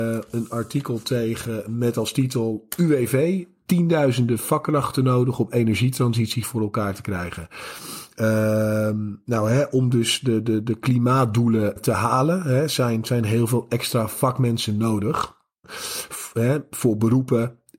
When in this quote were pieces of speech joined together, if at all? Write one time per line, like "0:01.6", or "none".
0:11.8
0:15.6